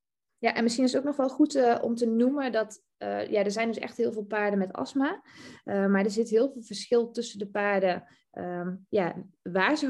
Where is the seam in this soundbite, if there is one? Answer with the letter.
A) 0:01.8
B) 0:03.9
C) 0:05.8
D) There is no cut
D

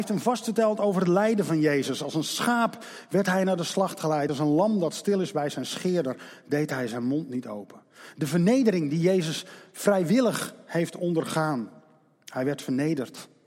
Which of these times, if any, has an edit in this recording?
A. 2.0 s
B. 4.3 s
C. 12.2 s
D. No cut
D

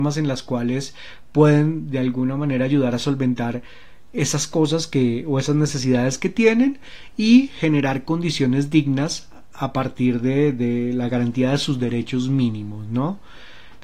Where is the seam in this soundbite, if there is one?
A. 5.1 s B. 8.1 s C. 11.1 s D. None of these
C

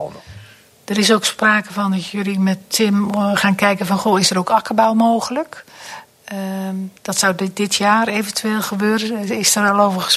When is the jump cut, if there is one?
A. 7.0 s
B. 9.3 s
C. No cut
A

